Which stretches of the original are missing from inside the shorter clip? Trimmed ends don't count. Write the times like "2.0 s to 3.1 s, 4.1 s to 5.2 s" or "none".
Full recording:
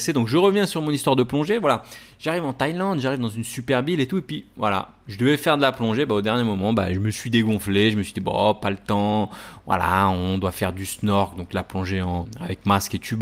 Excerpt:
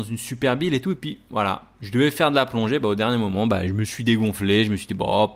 none